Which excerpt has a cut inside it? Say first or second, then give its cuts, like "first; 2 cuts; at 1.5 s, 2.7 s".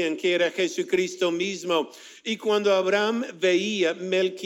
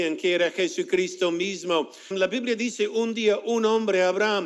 second; 1 cut; at 2.1 s